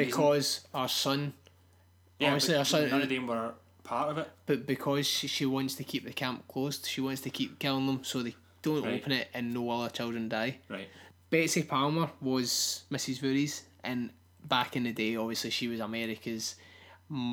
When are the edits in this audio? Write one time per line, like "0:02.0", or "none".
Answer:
none